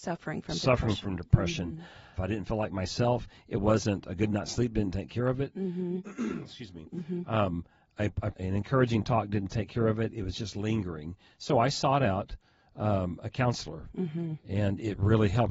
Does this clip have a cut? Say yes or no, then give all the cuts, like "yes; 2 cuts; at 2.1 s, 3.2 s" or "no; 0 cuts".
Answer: yes; 2 cuts; at 2.2 s, 8.3 s